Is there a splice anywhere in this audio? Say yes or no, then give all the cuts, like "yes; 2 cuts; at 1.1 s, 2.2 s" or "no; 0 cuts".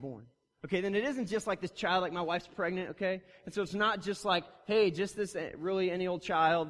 no; 0 cuts